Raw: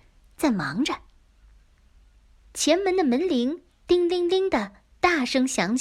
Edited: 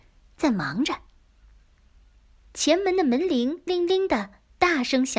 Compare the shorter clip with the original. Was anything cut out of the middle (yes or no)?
yes